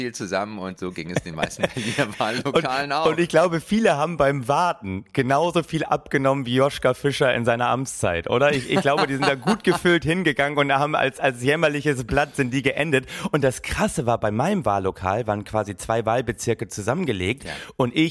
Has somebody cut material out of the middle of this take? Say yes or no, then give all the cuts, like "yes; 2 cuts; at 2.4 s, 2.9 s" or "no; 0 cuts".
no; 0 cuts